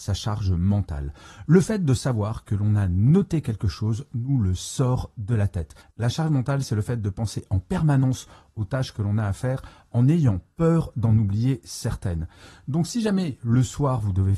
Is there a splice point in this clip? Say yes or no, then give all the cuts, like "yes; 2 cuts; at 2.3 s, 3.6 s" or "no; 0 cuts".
yes; 1 cut; at 5.8 s